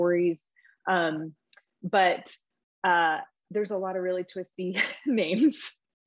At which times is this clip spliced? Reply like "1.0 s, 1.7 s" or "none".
none